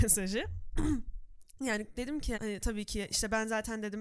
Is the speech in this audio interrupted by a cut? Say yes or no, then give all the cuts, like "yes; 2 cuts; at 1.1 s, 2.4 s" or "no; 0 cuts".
yes; 1 cut; at 2.3 s